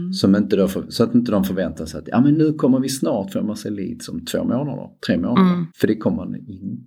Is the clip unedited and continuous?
no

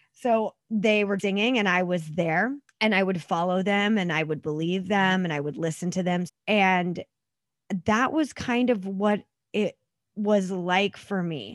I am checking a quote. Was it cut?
yes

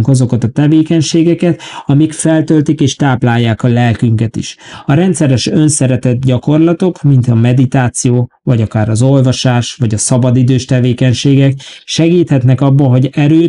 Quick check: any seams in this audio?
no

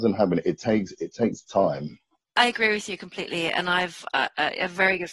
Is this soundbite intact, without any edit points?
yes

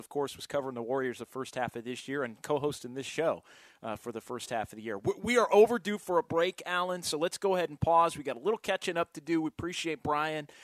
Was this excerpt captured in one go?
yes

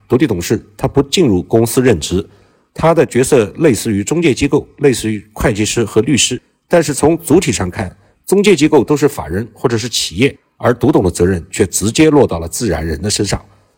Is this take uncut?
yes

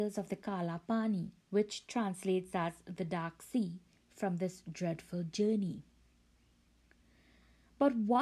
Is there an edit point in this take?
yes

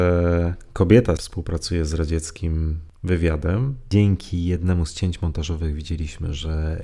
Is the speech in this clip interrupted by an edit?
yes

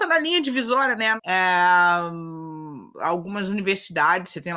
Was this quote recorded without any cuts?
no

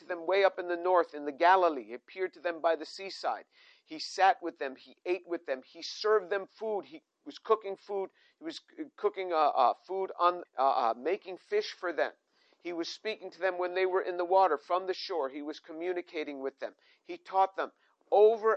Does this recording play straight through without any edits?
no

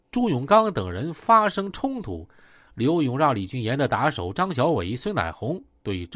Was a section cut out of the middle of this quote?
no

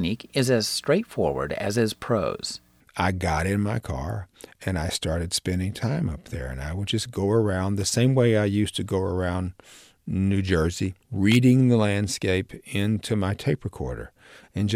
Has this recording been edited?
no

